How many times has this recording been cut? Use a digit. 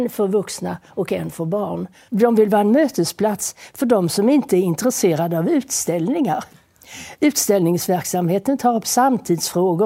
1